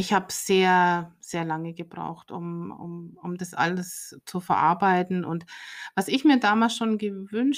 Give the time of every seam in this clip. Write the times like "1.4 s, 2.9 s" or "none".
none